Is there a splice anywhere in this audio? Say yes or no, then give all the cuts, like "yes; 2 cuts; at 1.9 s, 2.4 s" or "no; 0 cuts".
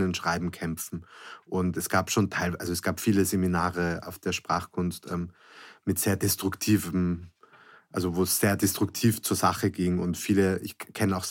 no; 0 cuts